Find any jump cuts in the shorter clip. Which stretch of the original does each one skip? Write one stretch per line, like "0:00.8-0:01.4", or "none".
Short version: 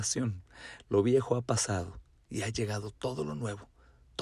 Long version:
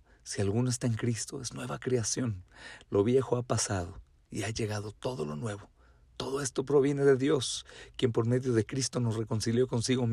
none